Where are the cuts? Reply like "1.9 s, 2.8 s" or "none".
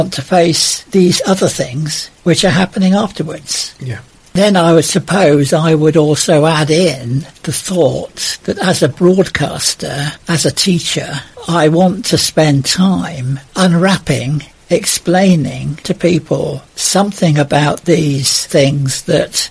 none